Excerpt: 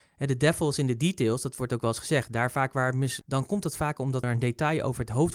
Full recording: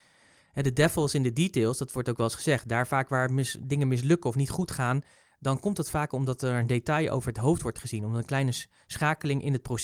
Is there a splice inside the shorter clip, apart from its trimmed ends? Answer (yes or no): yes